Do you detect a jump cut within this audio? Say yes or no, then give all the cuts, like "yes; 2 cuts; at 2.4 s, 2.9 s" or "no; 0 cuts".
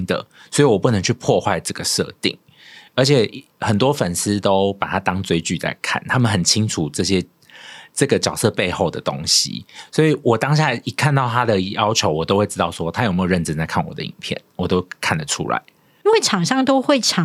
no; 0 cuts